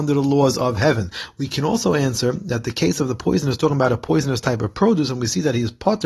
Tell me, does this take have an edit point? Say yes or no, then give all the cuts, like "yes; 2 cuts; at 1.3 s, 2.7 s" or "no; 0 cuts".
no; 0 cuts